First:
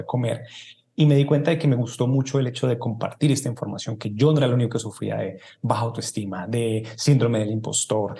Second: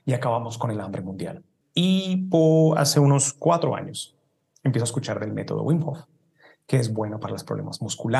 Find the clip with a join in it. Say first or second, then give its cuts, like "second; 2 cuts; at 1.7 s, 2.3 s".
second; 1 cut; at 1.6 s